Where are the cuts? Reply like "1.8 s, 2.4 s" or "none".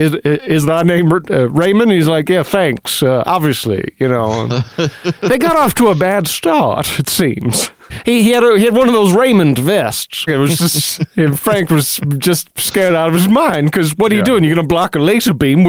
7.9 s, 10.3 s